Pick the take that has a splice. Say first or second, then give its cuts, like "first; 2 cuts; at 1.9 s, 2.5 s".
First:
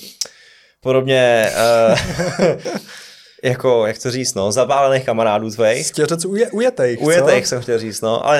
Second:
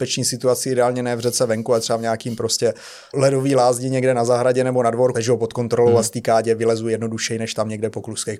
second; 2 cuts; at 3.1 s, 5.1 s